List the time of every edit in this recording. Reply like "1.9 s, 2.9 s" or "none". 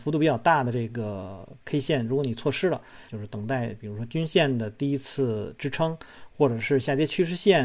3.1 s